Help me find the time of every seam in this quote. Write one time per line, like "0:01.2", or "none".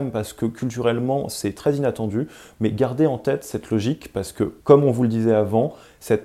0:04.6